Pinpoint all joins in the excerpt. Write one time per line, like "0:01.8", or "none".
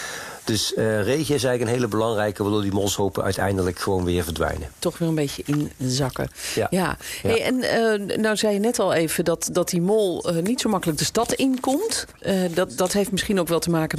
none